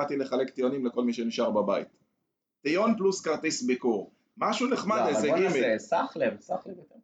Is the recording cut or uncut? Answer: uncut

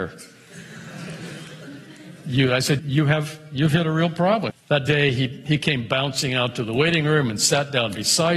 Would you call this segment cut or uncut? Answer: cut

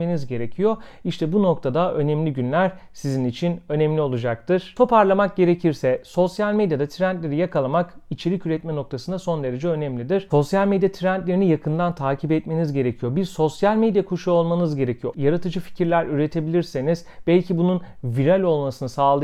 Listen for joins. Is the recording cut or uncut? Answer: cut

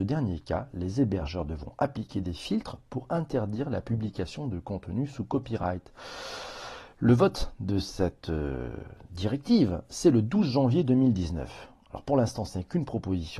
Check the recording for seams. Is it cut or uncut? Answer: uncut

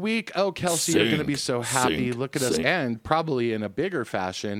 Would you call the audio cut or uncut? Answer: cut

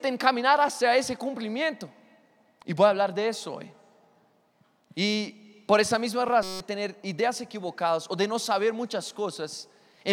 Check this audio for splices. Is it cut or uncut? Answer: uncut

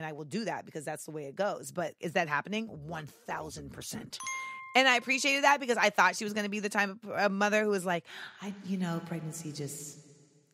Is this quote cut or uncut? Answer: cut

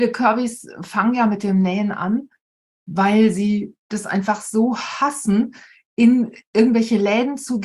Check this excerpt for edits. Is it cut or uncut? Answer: uncut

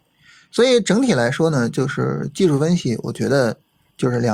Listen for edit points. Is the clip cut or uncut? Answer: uncut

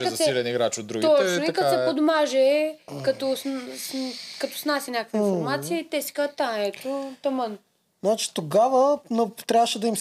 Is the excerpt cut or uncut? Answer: uncut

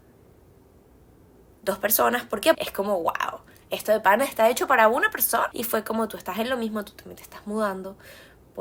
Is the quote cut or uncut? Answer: cut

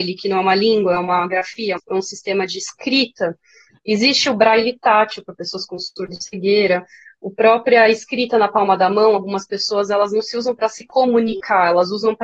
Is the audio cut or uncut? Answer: cut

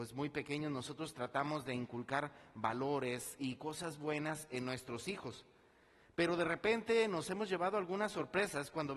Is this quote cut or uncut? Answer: uncut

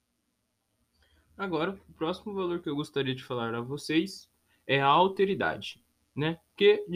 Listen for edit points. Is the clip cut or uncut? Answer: uncut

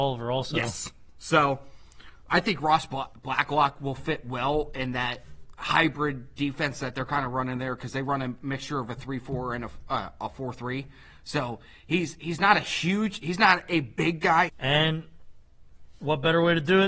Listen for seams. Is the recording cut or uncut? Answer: cut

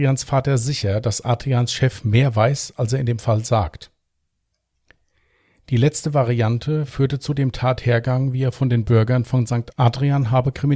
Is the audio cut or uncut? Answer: cut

